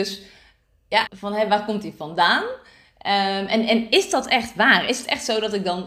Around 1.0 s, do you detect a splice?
yes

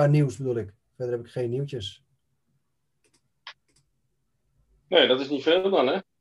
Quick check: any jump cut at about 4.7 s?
no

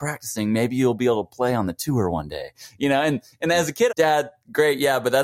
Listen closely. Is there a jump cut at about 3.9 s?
yes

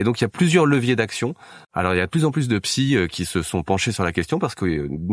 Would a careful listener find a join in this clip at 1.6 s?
yes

